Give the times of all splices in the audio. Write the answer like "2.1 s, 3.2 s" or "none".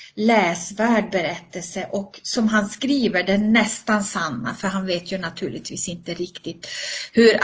none

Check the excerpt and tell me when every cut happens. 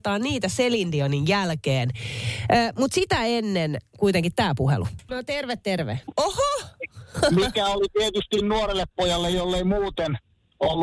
5.1 s, 6.1 s

